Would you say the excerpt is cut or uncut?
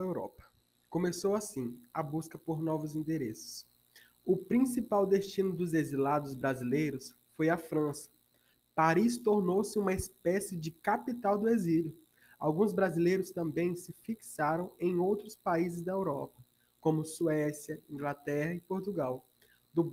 uncut